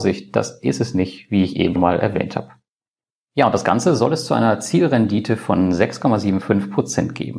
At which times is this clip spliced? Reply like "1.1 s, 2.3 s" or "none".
1.8 s